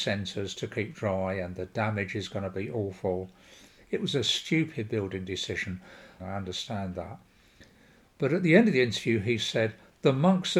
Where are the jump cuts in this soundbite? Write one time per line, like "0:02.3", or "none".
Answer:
0:03.8
0:06.2